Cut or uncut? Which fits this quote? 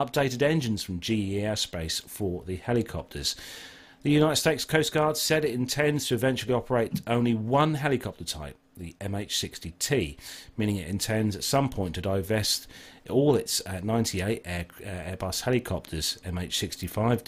uncut